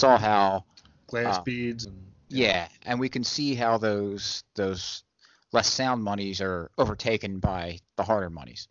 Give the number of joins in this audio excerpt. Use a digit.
1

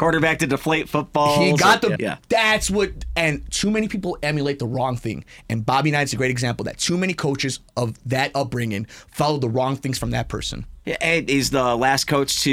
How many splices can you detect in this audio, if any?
1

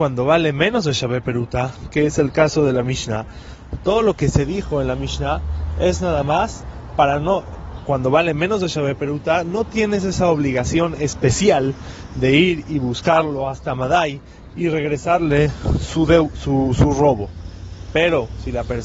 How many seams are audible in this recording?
0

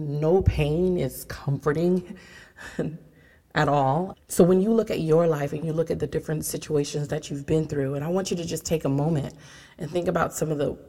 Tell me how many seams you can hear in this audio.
1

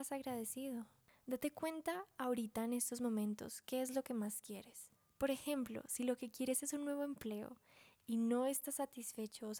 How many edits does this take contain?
0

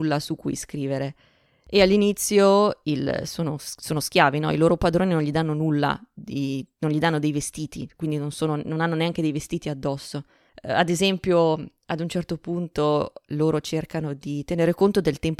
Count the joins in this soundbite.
1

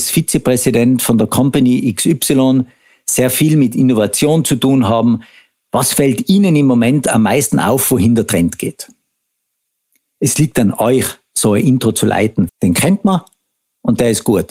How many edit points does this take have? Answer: 1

